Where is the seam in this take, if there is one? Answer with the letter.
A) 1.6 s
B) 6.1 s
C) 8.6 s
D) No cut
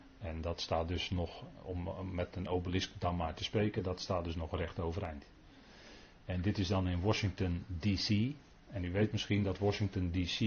D